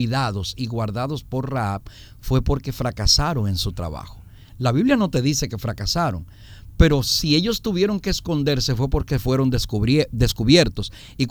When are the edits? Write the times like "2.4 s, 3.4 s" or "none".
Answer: none